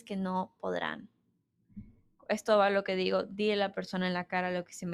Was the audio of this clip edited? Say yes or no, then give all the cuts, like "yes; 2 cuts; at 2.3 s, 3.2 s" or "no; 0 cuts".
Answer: no; 0 cuts